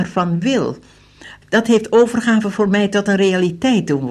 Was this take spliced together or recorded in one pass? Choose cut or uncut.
cut